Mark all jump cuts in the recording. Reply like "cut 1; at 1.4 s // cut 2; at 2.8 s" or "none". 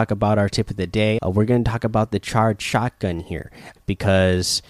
cut 1; at 1.2 s // cut 2; at 3.8 s